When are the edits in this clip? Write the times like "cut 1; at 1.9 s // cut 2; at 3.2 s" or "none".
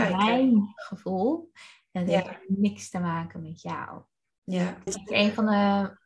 cut 1; at 4.9 s